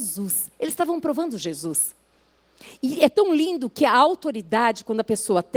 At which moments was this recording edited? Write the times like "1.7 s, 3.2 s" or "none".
none